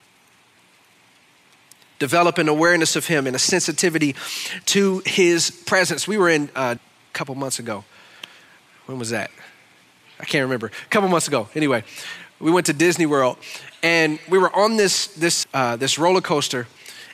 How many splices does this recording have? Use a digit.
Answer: 2